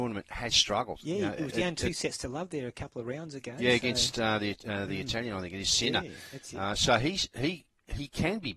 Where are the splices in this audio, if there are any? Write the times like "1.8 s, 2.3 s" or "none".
none